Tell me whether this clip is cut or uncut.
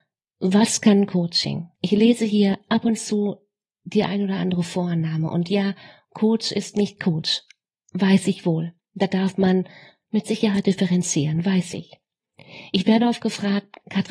uncut